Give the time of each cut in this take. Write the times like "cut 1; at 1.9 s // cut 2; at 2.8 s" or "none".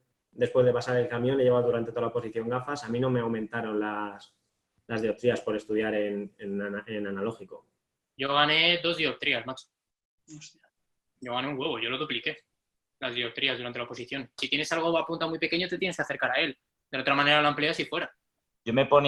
cut 1; at 14.4 s